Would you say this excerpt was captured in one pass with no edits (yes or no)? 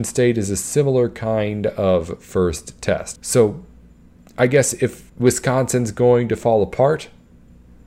no